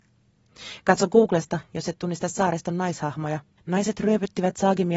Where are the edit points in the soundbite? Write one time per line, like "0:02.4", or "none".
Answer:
0:03.6

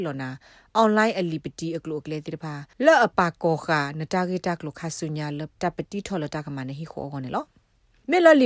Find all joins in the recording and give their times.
0:02.7

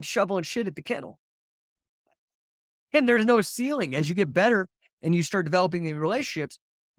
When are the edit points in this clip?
none

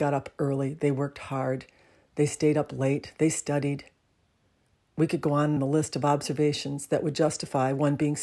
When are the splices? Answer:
0:05.6

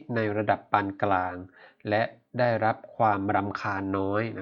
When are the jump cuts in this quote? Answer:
none

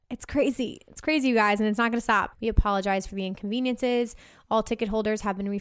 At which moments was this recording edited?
0:02.3

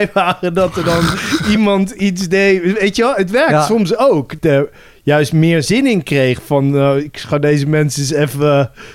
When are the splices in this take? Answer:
0:04.4

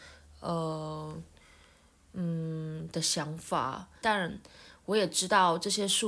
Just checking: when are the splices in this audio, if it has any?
0:04.0

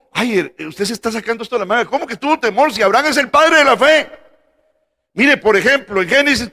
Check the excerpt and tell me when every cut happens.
0:05.4

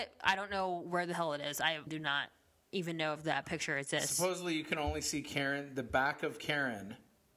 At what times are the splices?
0:01.9

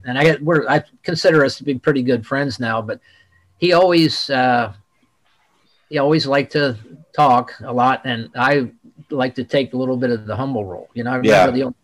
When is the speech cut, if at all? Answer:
none

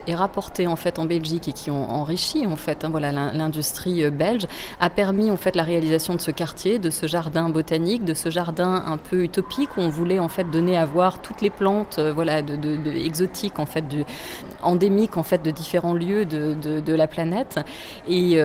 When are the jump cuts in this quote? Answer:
none

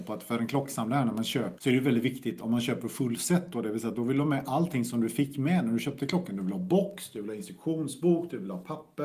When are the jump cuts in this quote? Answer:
0:01.6

